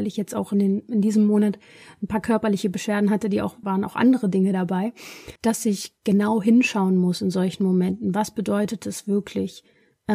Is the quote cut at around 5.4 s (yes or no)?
yes